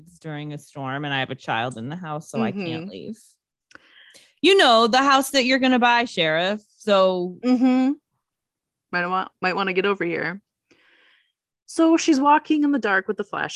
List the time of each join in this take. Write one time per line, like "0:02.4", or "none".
none